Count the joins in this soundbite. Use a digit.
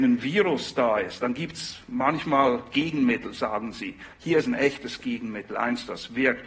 0